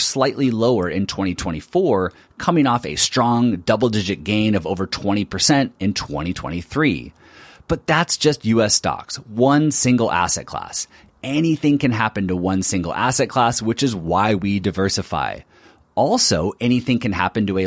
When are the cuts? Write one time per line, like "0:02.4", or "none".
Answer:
none